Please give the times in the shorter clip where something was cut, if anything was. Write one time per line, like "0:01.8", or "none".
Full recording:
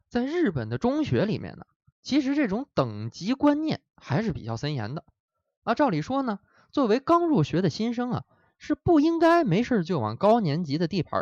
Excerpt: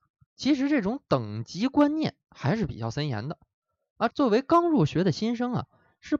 0:04.1